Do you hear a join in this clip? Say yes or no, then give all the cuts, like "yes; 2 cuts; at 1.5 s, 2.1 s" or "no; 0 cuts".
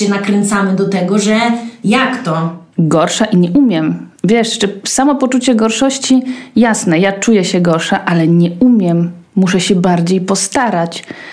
yes; 1 cut; at 2.7 s